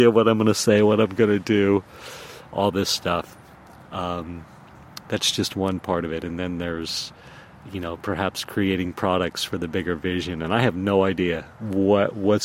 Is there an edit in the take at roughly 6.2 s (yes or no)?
no